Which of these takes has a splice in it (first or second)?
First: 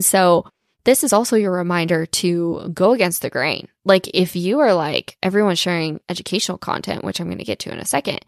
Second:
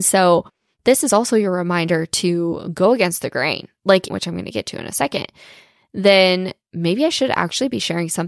second